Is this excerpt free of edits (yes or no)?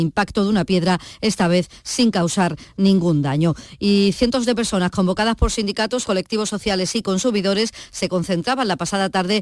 no